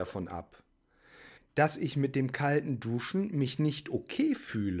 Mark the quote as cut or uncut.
cut